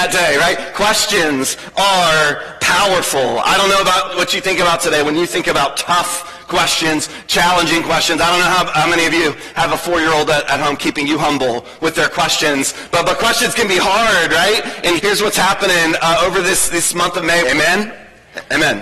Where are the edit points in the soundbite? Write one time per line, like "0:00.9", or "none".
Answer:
0:15.0
0:17.4